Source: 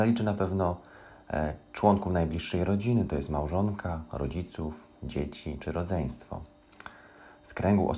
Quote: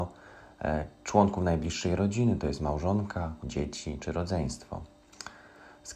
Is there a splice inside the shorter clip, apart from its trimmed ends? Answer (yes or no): yes